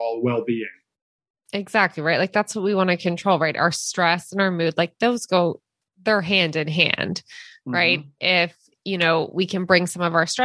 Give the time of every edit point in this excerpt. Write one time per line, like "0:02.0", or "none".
0:05.8